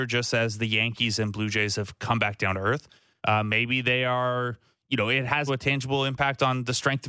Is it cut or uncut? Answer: cut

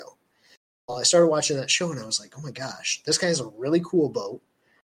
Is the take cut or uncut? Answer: uncut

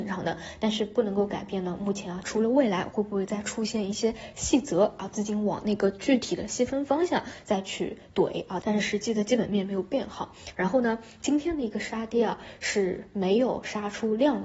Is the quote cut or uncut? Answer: cut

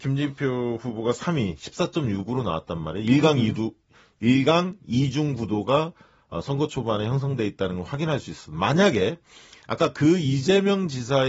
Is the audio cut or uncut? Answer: uncut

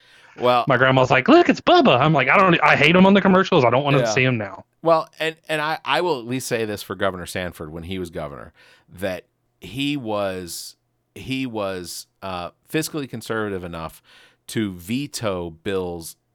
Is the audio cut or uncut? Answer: uncut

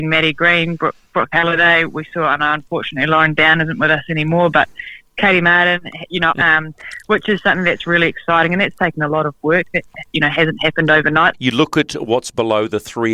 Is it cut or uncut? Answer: cut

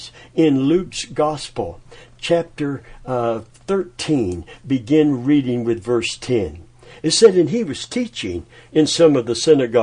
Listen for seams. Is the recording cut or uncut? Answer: uncut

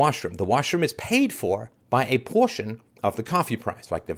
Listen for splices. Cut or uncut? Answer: cut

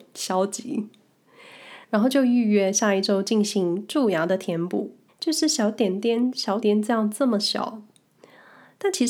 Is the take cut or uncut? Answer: cut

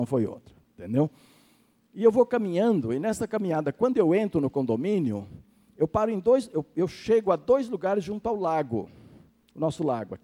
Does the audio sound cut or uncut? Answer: uncut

